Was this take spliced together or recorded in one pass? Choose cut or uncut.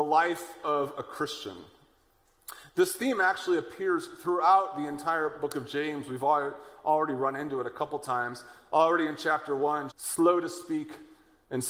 cut